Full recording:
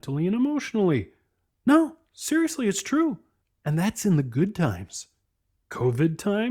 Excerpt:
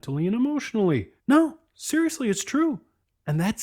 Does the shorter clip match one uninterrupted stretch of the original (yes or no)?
no